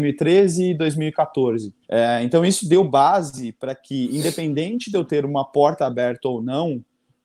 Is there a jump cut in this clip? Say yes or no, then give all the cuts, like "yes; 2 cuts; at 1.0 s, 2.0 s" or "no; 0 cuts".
yes; 1 cut; at 1.8 s